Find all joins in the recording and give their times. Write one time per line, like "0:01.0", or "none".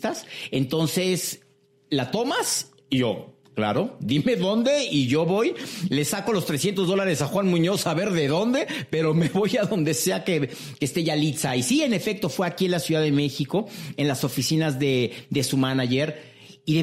none